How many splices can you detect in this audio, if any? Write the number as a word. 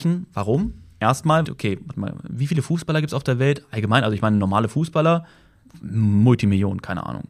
one